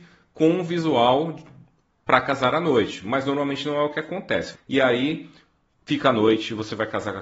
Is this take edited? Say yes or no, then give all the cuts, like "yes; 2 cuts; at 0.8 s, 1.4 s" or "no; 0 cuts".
yes; 1 cut; at 4.5 s